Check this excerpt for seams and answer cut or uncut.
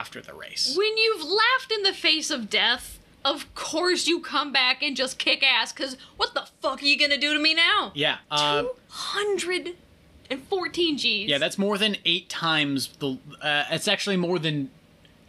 cut